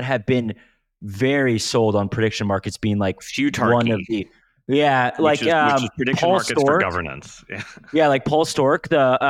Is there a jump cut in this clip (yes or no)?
no